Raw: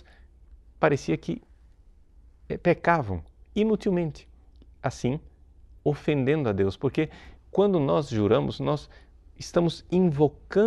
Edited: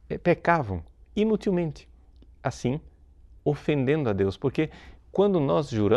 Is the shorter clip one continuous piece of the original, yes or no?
yes